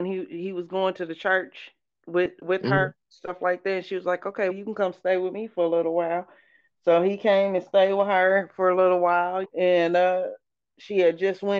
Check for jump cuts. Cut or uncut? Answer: cut